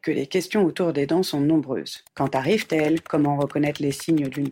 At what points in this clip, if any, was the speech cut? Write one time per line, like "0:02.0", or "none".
0:02.1